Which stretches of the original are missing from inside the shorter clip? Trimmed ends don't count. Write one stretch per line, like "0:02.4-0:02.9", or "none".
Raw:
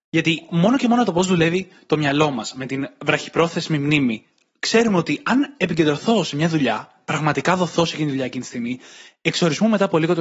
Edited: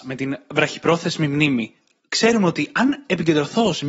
none